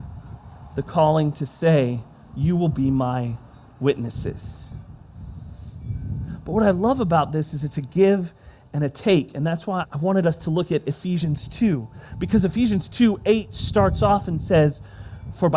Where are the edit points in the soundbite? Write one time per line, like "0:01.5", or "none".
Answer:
0:09.8